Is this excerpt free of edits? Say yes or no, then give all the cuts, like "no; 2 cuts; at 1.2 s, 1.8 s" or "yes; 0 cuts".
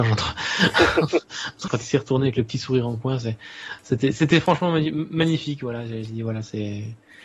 no; 1 cut; at 1.7 s